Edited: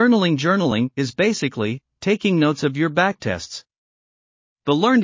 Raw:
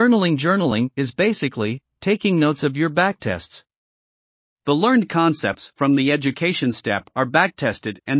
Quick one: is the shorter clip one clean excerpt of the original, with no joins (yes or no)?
yes